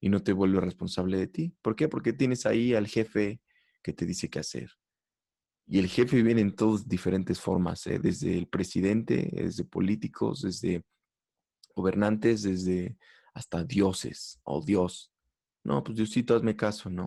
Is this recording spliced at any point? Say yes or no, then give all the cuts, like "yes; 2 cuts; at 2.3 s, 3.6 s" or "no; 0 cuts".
no; 0 cuts